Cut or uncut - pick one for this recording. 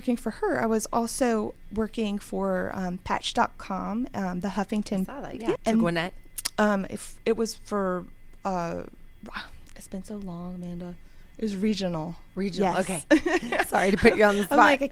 cut